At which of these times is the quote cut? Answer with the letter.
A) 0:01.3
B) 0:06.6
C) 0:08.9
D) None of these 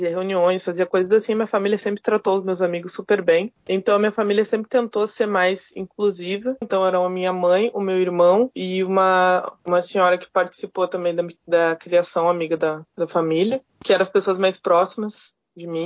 B